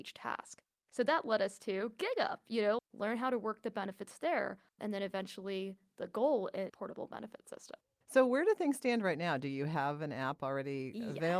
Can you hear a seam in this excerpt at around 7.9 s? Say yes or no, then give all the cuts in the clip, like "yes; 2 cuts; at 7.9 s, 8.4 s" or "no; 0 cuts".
no; 2 cuts; at 2.8 s, 6.7 s